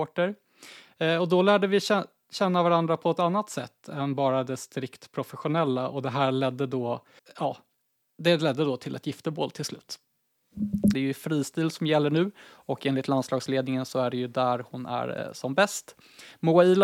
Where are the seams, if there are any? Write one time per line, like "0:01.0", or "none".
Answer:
0:07.2
0:10.9